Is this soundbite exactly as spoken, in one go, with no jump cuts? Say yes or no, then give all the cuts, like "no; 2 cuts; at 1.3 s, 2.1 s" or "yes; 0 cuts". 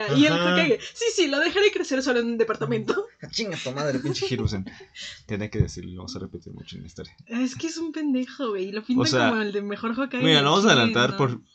yes; 0 cuts